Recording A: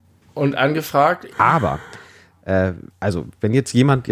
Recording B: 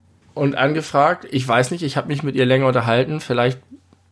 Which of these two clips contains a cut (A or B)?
A